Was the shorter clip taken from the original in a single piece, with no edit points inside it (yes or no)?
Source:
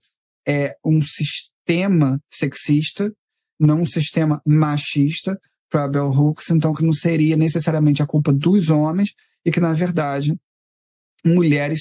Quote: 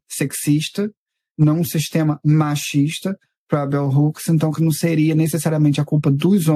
yes